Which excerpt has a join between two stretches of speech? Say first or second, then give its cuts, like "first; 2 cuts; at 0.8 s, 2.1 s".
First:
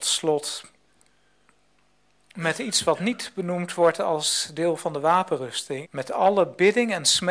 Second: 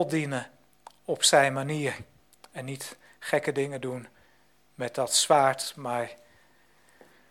first; 1 cut; at 5.8 s